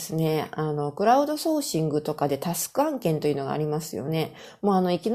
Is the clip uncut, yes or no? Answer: yes